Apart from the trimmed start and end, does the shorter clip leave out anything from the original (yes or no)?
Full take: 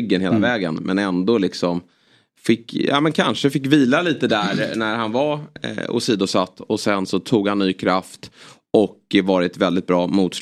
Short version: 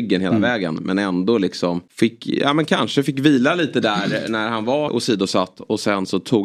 yes